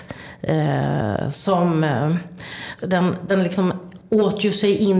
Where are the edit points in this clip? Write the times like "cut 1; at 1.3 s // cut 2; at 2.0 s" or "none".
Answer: cut 1; at 2.8 s

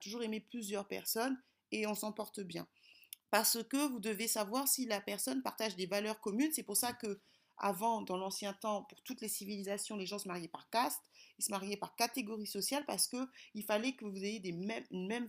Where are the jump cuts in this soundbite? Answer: cut 1; at 3.2 s

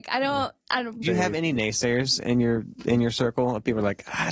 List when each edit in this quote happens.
cut 1; at 1.0 s

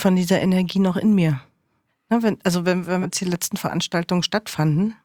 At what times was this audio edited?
cut 1; at 1.9 s // cut 2; at 3.0 s

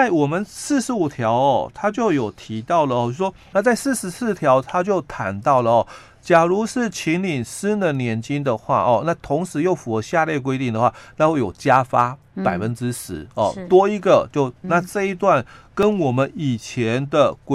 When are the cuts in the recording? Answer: cut 1; at 3.5 s // cut 2; at 14.6 s

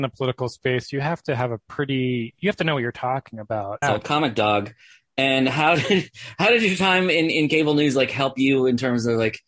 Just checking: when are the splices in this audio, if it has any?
cut 1; at 3.8 s

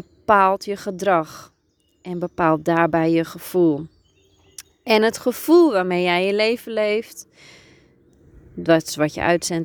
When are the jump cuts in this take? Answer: none

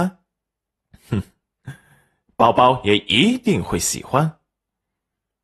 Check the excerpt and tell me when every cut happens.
cut 1; at 2.3 s

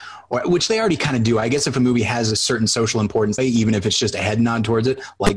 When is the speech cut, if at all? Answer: cut 1; at 3.4 s

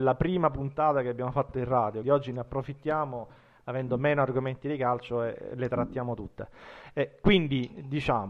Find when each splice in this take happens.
cut 1; at 2.0 s

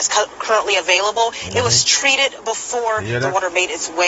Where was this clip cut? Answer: none

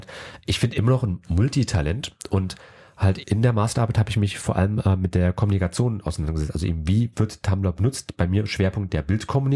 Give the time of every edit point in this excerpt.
cut 1; at 3.2 s

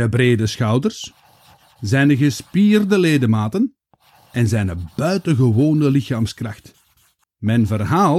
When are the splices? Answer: cut 1; at 7.2 s

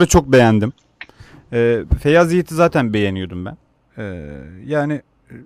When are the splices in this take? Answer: cut 1; at 3.8 s

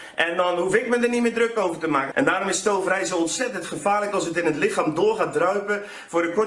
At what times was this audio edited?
cut 1; at 2.1 s

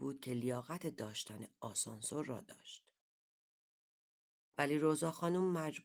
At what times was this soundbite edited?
cut 1; at 4.4 s

